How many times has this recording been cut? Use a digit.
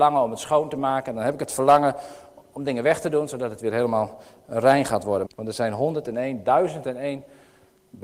1